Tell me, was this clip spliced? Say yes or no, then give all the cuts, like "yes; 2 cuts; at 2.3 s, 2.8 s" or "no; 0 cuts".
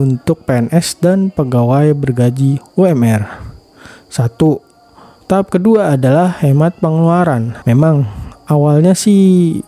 yes; 2 cuts; at 5.2 s, 7.6 s